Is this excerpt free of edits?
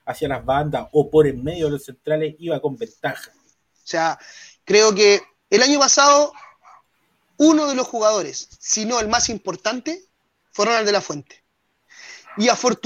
no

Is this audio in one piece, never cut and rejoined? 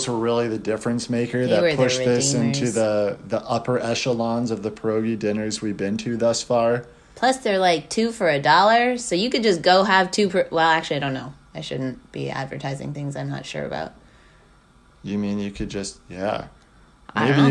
yes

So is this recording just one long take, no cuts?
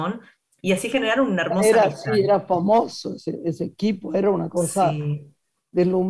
yes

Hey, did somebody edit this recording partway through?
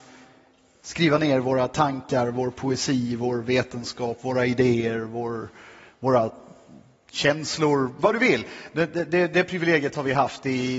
no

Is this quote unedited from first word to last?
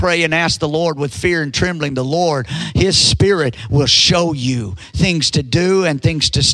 yes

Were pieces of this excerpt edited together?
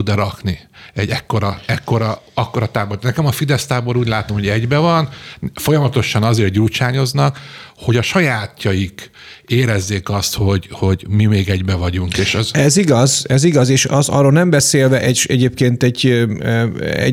no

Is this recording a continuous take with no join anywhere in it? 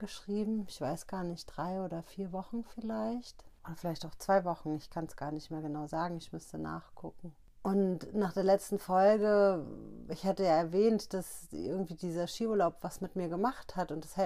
yes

